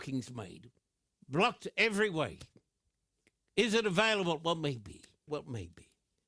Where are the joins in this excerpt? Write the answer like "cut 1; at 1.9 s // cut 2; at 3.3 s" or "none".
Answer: cut 1; at 5.3 s